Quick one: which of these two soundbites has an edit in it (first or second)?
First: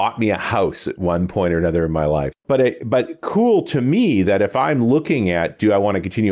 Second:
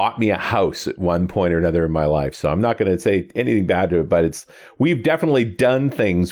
first